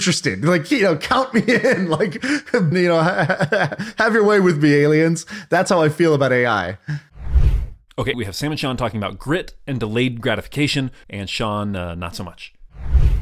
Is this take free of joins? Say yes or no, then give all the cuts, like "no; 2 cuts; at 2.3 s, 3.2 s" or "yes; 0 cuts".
no; 3 cuts; at 2.7 s, 8.1 s, 11.0 s